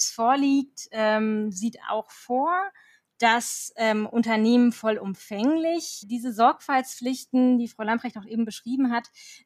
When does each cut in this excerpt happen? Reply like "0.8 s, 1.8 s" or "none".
none